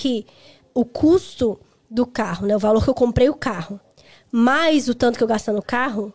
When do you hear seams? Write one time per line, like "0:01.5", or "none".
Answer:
none